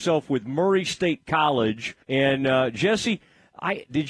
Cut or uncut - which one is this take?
cut